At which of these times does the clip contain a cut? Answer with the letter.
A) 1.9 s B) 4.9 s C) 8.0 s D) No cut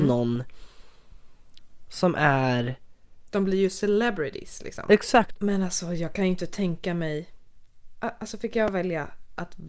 D